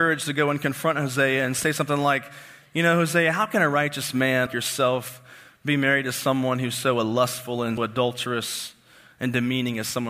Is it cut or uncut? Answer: cut